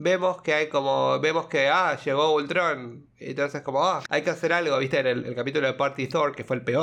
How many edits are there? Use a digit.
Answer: 1